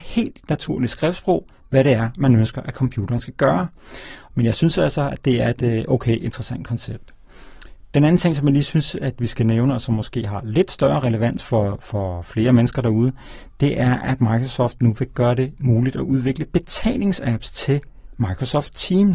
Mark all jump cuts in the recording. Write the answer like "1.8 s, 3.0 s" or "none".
4.3 s